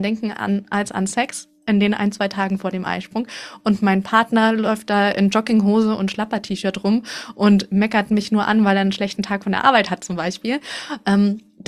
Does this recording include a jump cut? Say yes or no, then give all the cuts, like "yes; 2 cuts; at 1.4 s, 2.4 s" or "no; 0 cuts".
no; 0 cuts